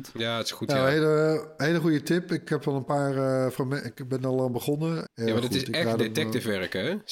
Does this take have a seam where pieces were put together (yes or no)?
yes